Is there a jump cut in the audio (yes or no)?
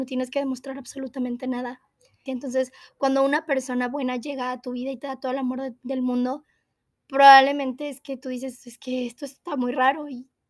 yes